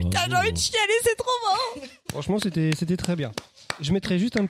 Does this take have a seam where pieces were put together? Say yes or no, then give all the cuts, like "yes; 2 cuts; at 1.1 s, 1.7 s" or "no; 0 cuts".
no; 0 cuts